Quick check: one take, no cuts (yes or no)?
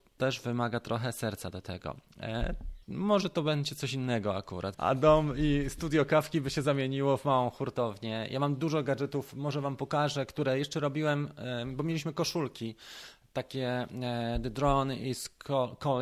no